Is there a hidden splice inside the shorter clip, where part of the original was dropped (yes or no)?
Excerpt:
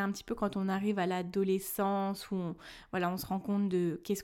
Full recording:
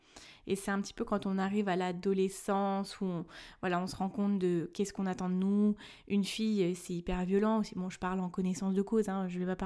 no